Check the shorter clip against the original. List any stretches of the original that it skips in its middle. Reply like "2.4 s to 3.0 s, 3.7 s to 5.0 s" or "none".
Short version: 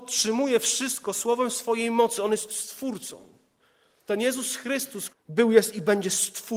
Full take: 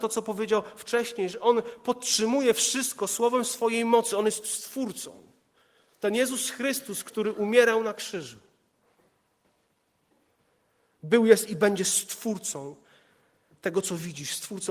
7.0 s to 10.8 s

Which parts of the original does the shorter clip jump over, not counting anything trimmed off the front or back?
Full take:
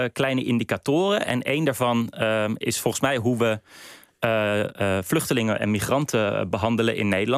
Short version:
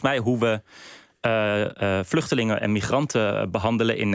none

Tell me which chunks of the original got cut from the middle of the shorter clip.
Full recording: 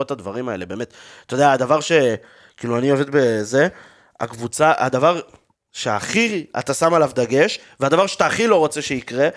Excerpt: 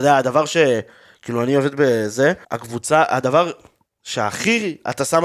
3.8 s to 4.1 s

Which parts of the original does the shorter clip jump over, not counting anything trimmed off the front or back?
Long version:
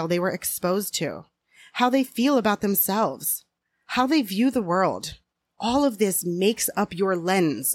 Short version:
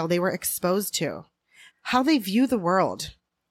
1.7 s to 3.7 s

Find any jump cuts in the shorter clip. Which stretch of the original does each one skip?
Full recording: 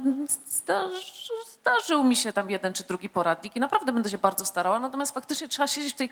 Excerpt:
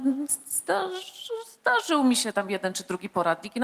none

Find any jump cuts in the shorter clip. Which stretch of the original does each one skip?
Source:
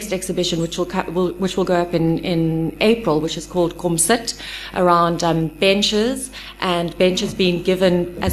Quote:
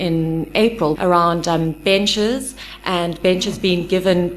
3.2 s to 4.7 s

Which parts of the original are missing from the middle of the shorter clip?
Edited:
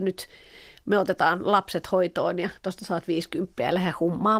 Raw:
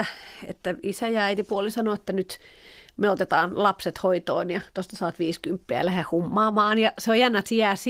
none

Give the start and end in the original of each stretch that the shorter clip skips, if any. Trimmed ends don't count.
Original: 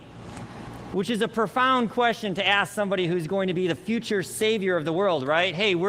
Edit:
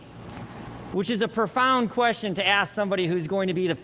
none

